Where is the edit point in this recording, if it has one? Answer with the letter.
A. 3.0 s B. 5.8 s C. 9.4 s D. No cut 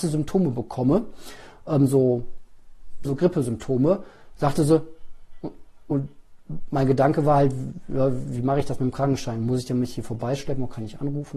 A